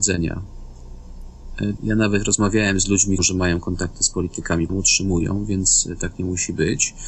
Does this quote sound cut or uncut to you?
cut